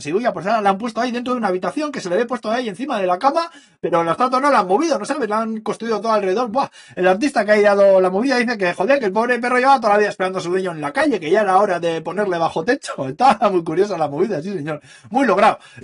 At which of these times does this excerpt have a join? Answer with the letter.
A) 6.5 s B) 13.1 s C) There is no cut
C